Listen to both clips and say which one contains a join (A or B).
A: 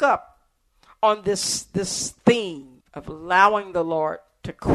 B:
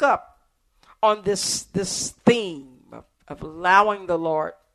A